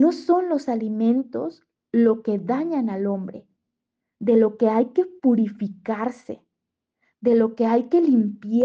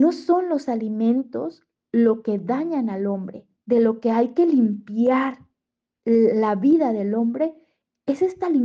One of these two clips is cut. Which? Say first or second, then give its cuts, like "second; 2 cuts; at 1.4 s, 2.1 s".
second; 1 cut; at 3.6 s